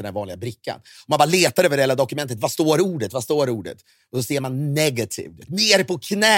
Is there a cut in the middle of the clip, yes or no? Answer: no